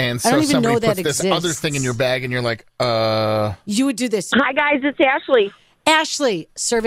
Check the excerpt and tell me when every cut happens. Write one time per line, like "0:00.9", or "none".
0:04.3